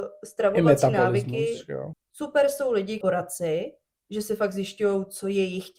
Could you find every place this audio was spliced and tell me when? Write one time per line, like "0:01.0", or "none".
0:01.9
0:03.0

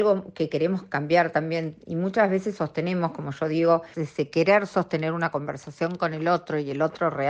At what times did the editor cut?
0:03.9

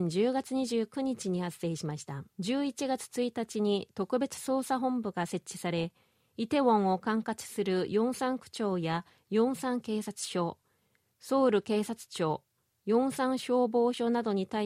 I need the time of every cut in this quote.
0:02.3

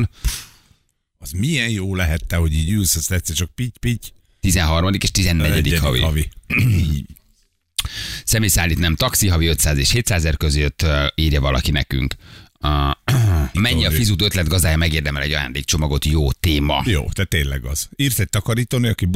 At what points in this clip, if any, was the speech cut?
0:13.5

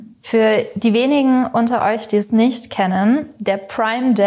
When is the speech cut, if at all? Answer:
none

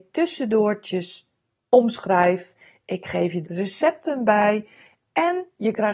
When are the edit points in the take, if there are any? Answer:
0:03.4

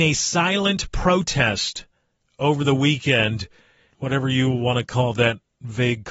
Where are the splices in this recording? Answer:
0:03.9

